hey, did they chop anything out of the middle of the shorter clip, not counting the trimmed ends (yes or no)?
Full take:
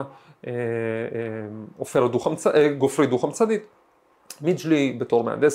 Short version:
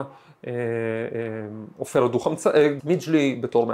yes